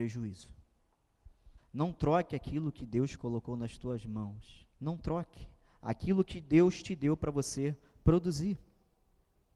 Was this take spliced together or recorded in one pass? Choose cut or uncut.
cut